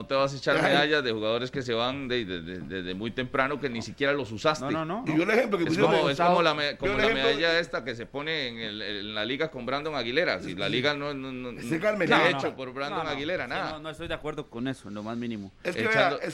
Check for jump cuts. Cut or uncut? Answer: uncut